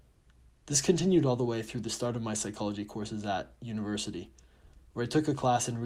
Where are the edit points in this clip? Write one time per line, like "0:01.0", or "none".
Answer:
none